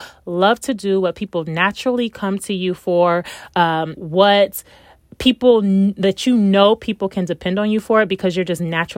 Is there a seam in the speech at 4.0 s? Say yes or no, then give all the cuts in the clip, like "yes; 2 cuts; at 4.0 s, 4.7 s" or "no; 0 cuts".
yes; 1 cut; at 4.0 s